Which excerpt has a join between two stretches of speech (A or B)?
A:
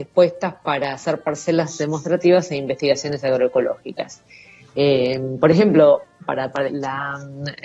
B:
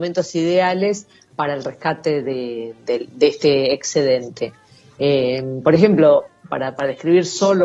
A